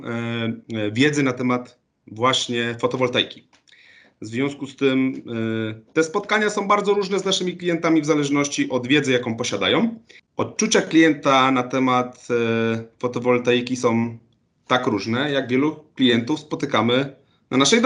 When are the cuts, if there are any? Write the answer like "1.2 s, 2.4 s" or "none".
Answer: 10.2 s